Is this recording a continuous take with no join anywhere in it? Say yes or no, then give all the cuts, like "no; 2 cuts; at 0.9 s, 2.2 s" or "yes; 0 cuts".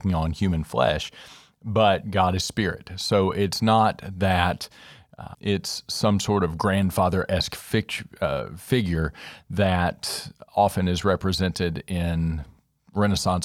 no; 1 cut; at 5.3 s